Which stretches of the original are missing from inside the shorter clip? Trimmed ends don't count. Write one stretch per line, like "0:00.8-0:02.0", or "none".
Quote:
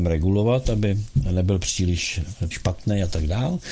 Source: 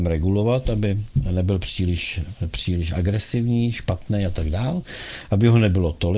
0:02.5-0:03.7